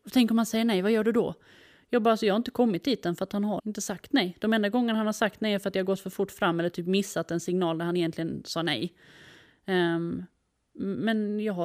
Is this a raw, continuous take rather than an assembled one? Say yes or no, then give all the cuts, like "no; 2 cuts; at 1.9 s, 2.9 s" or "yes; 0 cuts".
no; 1 cut; at 3.6 s